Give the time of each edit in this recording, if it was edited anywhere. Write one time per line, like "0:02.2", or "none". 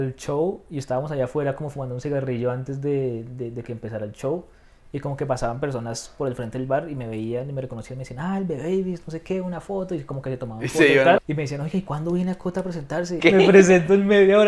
0:11.2
0:13.2